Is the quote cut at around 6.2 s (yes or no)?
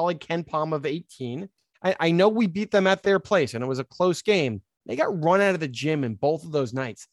no